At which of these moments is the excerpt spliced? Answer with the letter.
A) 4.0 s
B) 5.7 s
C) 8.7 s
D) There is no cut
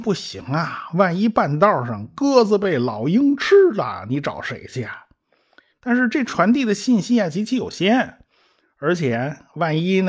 B